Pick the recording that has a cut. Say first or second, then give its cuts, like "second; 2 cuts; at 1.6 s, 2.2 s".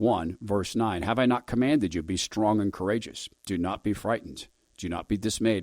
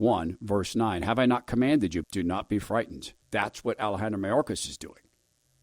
second; 2 cuts; at 2.0 s, 3.2 s